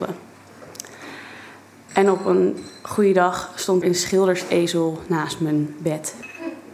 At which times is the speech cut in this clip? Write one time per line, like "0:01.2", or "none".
0:01.9
0:03.8